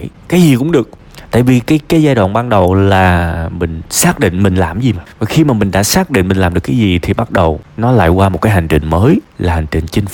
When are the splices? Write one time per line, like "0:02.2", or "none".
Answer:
none